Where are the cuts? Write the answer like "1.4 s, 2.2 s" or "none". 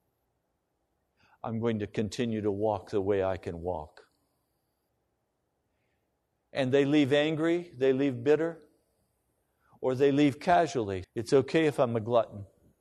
11.0 s

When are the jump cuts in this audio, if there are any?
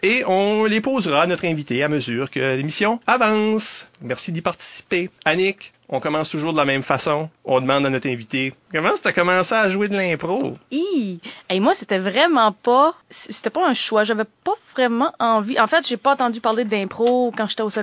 none

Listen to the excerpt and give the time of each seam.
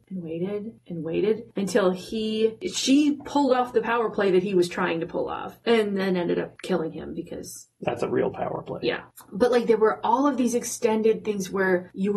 none

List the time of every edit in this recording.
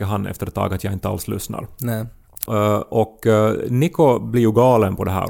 2.4 s

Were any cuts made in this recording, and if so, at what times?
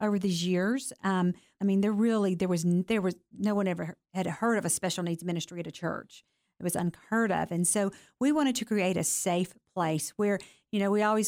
1.6 s

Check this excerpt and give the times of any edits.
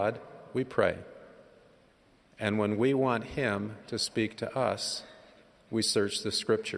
none

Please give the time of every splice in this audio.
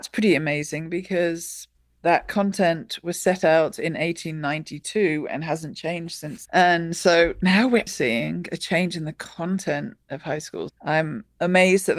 6.5 s, 7.9 s, 10.7 s

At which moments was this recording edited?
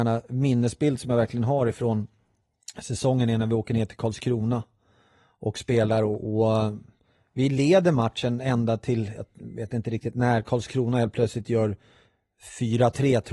none

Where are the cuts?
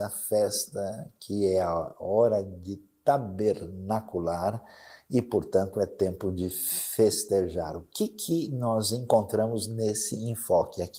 none

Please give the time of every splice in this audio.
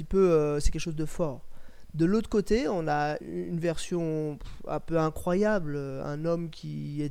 3.2 s

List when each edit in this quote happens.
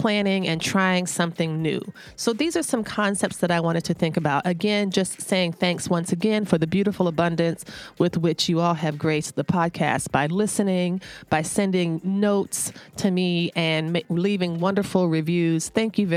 none

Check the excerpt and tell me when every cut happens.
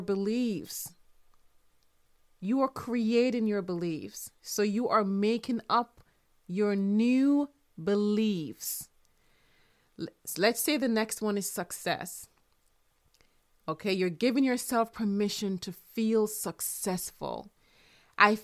none

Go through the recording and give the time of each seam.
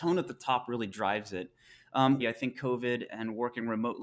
2.2 s

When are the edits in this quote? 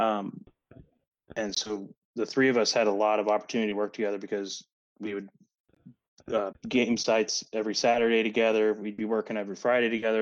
6.5 s

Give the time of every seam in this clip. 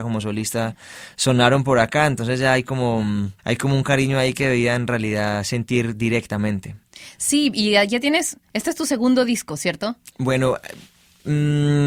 3.4 s, 10.1 s

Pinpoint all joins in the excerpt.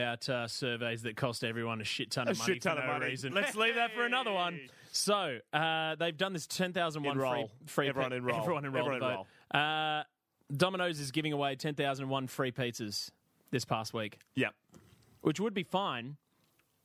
3.3 s

